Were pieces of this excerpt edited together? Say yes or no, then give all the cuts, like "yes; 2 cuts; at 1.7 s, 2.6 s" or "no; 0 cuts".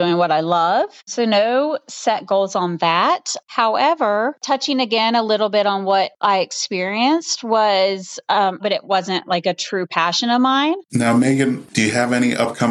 yes; 2 cuts; at 8.6 s, 10.9 s